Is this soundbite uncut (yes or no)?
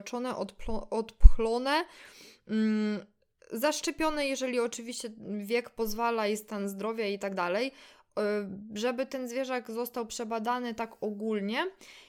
yes